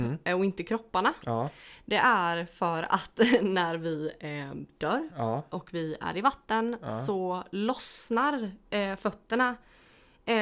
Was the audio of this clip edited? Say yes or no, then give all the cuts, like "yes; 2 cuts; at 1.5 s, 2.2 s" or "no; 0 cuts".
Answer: no; 0 cuts